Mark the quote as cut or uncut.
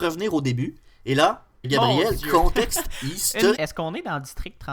cut